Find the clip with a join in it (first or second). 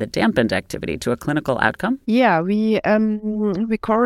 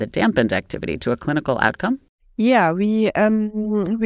first